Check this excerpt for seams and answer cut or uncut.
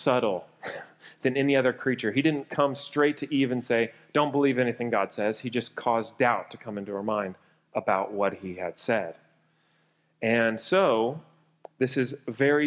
uncut